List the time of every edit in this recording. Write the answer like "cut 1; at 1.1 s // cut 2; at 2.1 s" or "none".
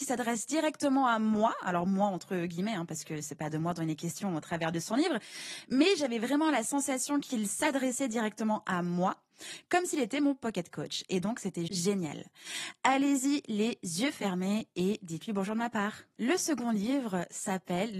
cut 1; at 11.7 s